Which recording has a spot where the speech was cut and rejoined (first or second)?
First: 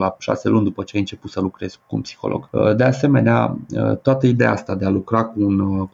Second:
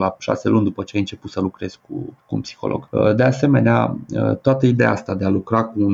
first